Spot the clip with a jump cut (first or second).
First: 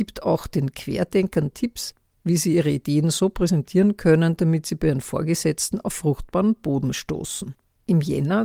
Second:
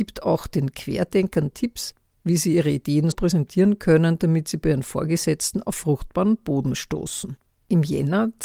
second